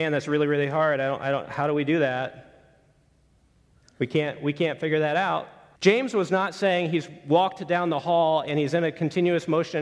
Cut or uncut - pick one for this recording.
cut